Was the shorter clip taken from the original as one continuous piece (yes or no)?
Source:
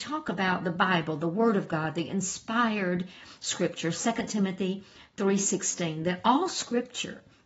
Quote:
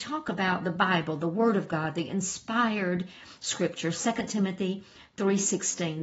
yes